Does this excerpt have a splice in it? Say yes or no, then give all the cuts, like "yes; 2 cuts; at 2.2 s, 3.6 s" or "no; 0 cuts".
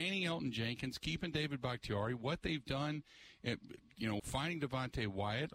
yes; 1 cut; at 4.2 s